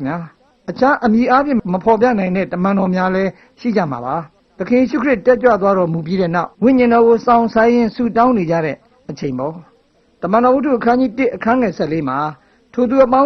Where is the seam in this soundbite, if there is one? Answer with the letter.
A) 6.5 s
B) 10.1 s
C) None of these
A